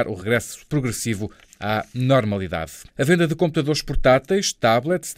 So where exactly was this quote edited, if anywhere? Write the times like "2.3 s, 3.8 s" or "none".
2.9 s